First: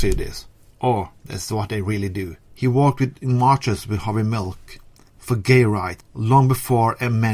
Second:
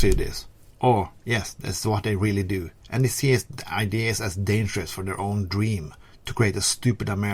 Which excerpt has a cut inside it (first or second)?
first